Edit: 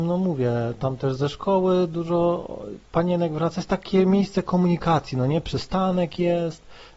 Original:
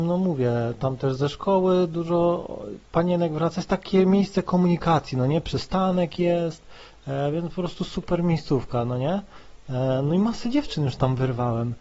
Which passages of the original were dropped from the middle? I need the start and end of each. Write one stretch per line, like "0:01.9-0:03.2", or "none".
none